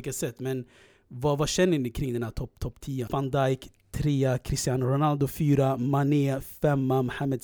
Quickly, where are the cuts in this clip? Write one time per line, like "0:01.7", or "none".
0:03.1